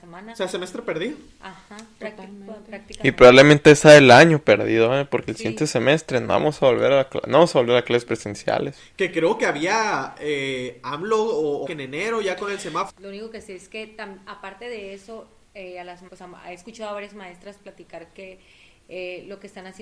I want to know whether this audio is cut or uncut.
cut